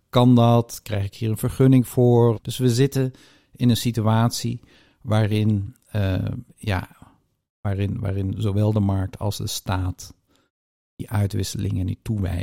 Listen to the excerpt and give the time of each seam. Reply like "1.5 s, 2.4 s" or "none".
2.3 s